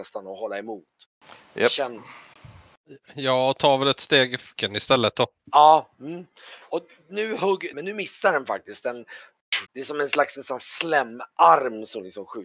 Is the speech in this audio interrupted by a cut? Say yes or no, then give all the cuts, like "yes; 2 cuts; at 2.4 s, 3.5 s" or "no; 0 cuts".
yes; 3 cuts; at 4.6 s, 7.7 s, 9.7 s